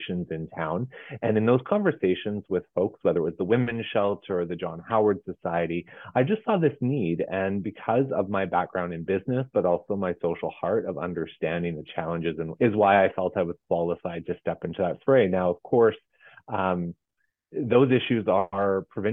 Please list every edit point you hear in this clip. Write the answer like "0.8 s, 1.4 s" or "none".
12.6 s